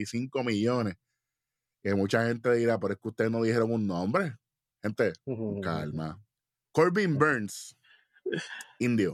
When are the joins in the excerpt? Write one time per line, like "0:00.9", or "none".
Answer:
none